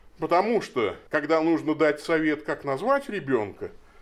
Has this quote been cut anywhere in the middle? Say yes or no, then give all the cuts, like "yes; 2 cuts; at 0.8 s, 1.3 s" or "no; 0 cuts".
yes; 1 cut; at 1.1 s